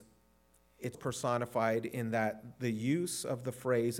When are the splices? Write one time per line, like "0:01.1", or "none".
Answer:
0:00.9